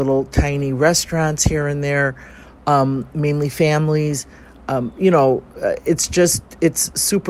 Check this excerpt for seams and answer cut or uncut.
uncut